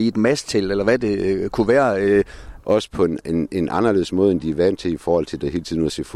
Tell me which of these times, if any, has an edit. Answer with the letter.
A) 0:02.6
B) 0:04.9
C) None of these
A